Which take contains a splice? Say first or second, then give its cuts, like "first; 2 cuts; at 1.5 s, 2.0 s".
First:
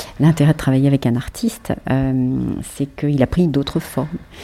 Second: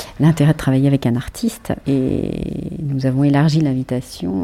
second; 1 cut; at 1.8 s